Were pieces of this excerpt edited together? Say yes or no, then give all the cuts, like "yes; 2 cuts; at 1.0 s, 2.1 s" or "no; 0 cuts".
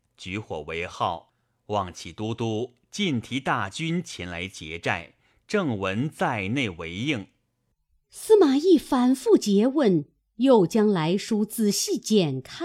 no; 0 cuts